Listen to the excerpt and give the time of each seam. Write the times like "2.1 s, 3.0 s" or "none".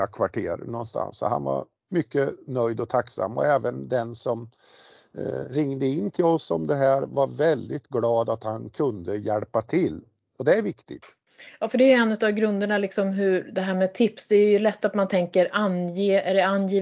none